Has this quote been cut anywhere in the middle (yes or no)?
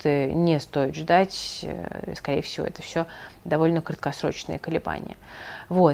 no